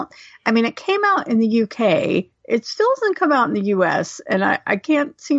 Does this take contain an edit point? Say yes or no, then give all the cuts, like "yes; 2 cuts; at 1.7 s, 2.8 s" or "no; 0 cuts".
no; 0 cuts